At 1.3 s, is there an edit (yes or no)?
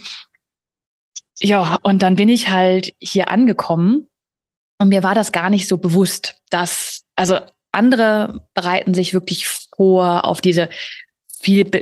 yes